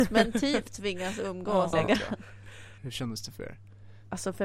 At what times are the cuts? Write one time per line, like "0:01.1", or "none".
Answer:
0:01.7
0:02.8